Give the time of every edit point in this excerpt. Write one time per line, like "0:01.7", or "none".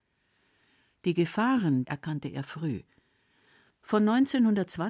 0:01.8